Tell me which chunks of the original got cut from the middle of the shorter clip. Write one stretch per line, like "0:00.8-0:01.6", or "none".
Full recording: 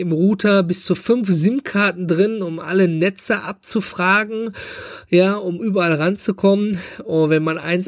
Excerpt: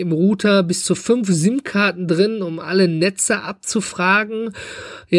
none